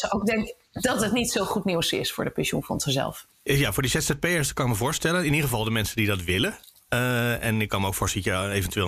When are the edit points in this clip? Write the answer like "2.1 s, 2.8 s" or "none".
3.3 s

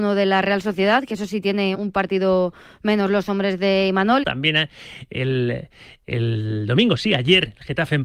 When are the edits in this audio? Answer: 1.7 s, 4.2 s

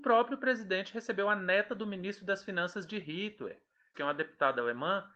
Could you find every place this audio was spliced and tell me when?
3.9 s

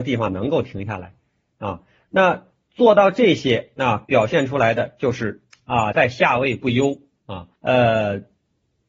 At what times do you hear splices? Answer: 5.9 s, 7.6 s

